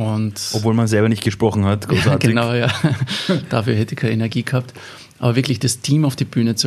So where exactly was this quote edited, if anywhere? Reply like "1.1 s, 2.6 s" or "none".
none